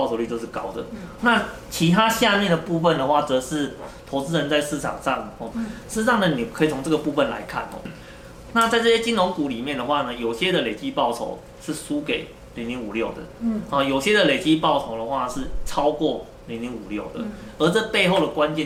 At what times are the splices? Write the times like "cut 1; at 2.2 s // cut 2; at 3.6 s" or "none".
cut 1; at 1.2 s // cut 2; at 5.5 s